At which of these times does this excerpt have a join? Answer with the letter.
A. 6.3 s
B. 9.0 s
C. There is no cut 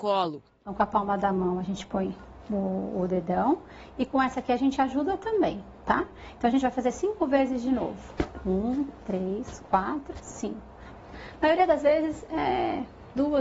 B